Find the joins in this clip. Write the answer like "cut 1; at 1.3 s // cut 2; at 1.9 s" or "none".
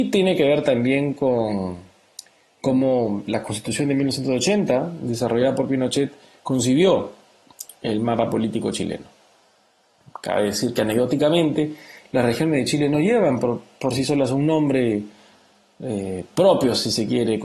none

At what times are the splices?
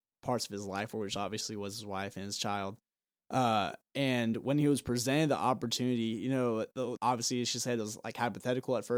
cut 1; at 7.0 s

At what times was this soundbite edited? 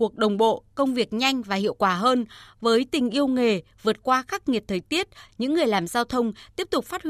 cut 1; at 5.3 s

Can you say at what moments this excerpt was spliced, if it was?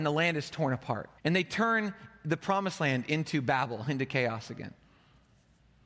cut 1; at 1.2 s

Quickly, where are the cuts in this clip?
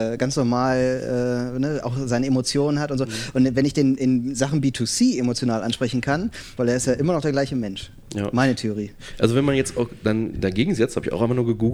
cut 1; at 6.6 s

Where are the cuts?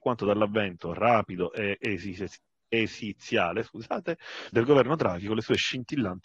cut 1; at 4.5 s

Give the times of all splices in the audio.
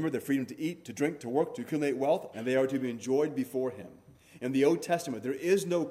cut 1; at 2.3 s

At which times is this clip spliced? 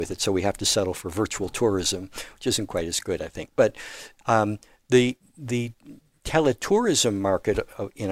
none

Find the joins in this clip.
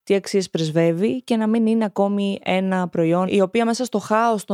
cut 1; at 3.3 s

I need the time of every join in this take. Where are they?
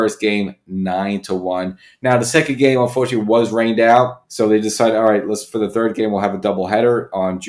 cut 1; at 4.3 s

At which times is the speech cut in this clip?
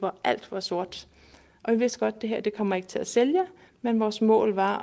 none

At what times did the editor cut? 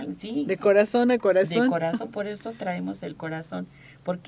none

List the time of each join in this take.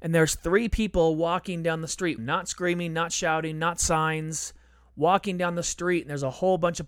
cut 1; at 2.2 s

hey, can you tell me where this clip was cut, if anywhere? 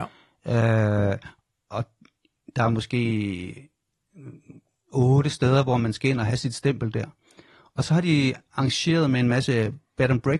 none

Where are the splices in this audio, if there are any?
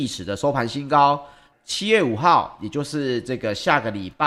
cut 1; at 1.5 s

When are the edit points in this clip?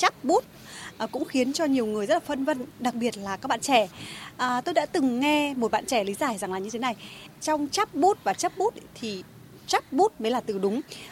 none

